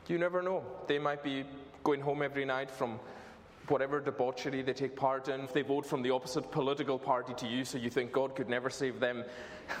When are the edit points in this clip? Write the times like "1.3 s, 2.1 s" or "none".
5.4 s